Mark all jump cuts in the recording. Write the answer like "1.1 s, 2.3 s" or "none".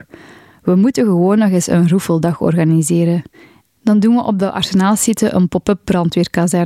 3.6 s